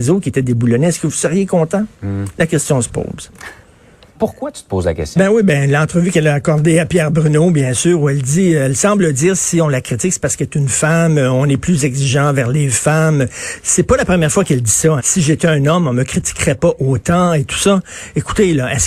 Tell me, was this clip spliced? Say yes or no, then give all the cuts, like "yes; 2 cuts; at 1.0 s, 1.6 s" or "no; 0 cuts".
yes; 2 cuts; at 4.1 s, 15.0 s